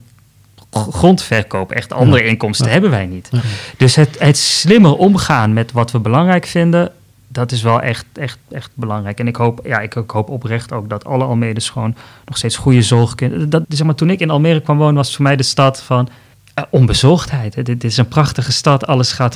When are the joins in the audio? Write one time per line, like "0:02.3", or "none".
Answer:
0:13.6